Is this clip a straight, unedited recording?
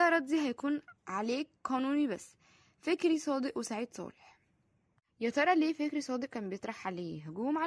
no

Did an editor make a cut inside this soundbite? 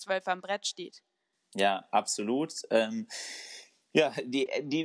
no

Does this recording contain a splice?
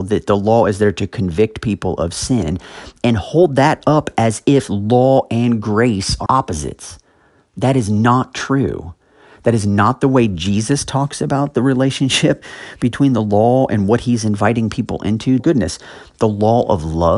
yes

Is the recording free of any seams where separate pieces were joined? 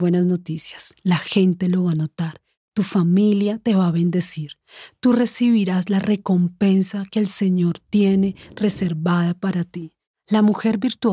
yes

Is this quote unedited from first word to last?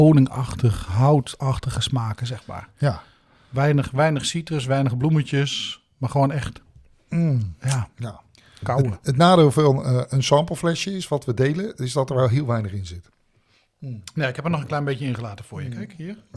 yes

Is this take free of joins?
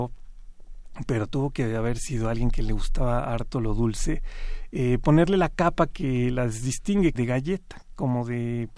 no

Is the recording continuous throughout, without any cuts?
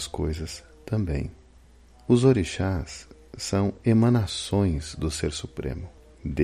yes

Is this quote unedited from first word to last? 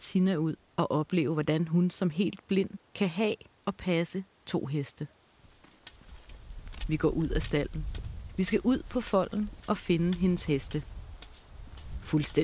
yes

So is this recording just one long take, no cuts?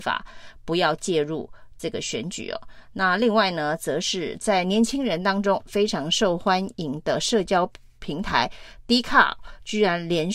yes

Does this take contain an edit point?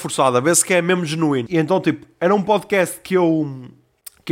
yes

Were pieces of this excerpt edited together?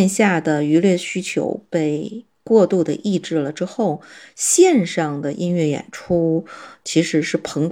no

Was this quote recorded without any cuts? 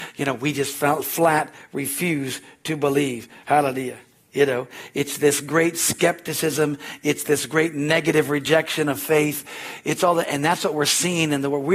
yes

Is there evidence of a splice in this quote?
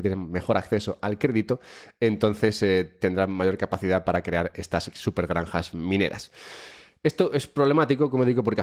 no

